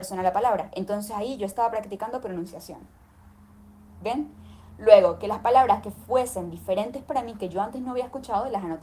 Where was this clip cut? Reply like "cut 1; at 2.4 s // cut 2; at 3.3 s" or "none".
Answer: none